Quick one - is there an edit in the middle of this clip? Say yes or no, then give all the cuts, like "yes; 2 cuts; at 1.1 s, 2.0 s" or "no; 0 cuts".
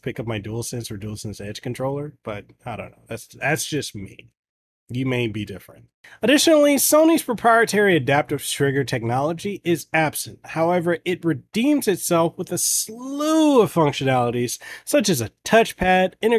no; 0 cuts